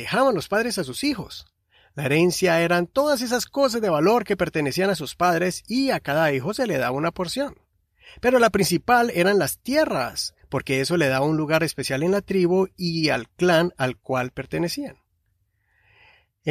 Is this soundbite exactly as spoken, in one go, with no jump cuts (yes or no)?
yes